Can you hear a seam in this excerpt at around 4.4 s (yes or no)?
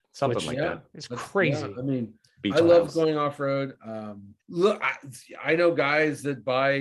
yes